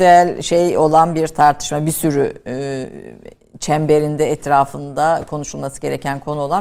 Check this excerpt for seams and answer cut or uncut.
uncut